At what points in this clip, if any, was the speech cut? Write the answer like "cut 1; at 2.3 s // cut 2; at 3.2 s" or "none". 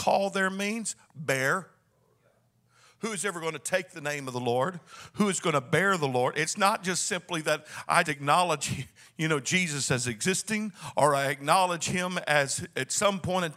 cut 1; at 8.0 s